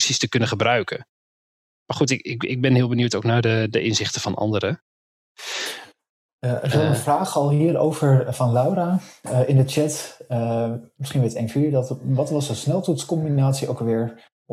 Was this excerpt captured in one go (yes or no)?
yes